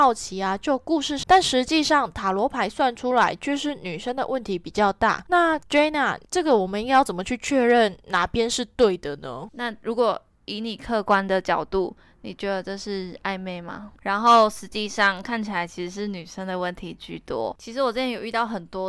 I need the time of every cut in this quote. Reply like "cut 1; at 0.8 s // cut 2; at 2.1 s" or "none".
cut 1; at 1.2 s // cut 2; at 9.5 s // cut 3; at 14.0 s